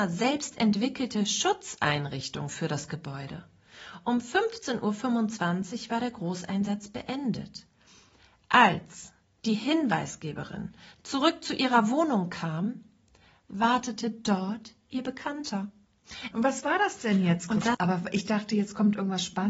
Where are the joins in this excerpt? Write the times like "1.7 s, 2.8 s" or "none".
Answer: 16.3 s, 17.7 s